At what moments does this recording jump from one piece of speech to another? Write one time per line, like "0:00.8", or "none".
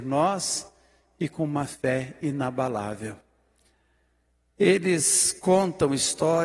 none